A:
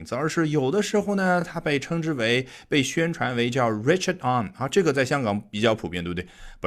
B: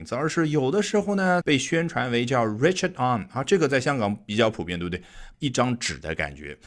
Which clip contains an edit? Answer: B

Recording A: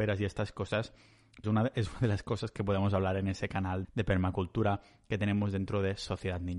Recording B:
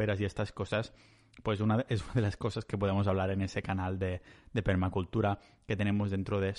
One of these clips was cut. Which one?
A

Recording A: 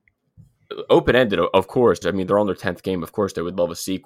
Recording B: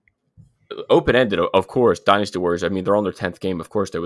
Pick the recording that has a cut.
A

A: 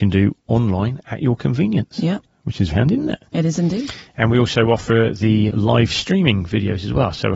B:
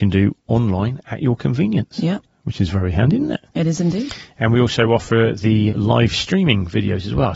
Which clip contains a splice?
A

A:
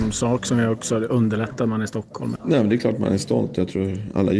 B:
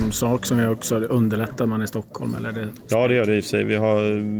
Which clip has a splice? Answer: A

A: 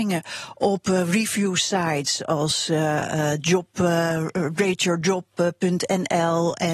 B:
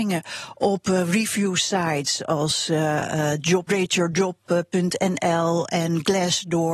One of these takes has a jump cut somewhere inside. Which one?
B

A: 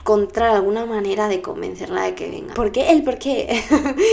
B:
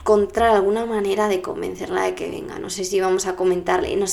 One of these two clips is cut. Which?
A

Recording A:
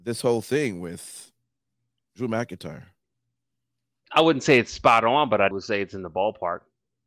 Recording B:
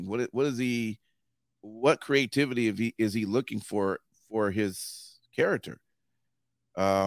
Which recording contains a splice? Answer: A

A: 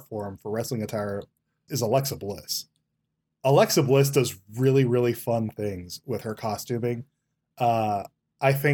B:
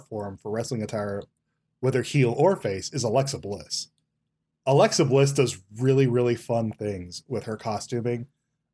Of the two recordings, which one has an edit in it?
A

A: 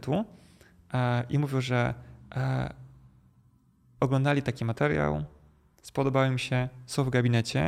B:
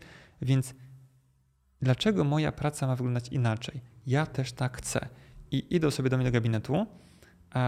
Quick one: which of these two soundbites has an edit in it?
B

